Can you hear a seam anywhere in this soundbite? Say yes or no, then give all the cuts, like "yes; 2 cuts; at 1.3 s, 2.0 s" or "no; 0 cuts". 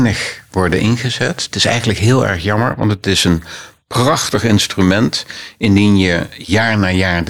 no; 0 cuts